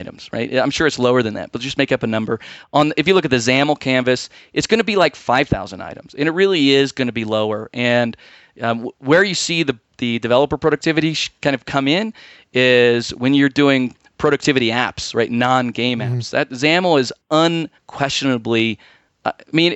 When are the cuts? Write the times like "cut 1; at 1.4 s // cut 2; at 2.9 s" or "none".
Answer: none